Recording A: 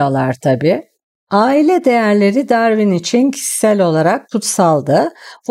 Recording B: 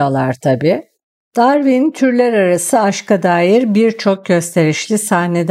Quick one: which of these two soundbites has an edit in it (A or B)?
A